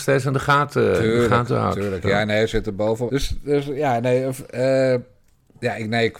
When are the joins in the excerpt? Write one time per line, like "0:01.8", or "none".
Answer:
0:03.1